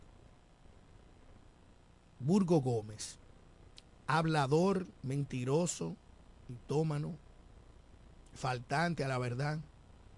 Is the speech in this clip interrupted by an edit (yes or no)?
no